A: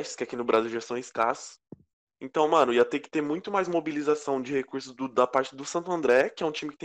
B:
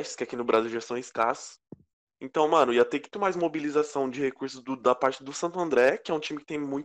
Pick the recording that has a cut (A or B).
B